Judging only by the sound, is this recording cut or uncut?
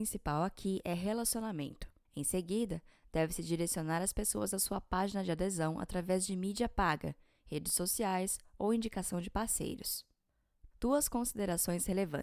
cut